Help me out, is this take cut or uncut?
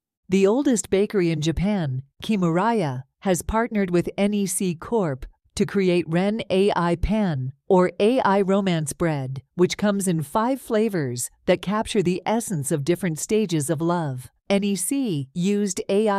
uncut